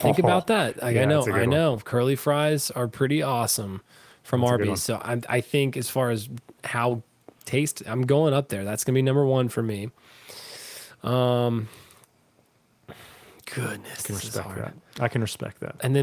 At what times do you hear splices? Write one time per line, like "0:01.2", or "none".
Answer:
none